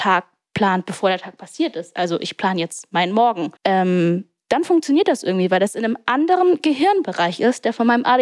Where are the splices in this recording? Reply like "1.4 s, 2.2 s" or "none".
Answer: 3.6 s